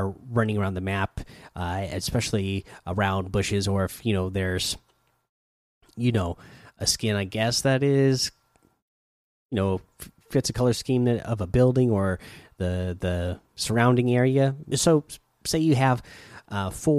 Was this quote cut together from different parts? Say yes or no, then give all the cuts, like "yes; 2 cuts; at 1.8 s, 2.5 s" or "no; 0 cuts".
yes; 1 cut; at 14.7 s